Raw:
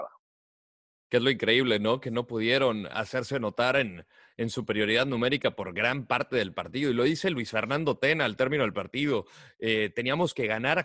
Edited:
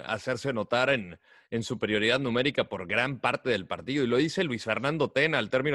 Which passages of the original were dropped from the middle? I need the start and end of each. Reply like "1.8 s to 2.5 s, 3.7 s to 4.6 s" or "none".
none